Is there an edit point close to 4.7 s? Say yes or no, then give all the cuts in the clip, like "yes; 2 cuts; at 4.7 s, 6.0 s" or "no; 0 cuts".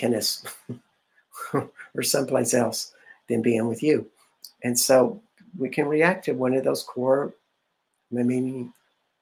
no; 1 cut; at 3.2 s